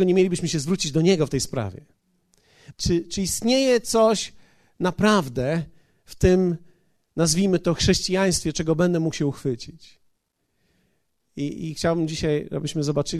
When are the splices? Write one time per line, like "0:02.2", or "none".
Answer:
0:02.7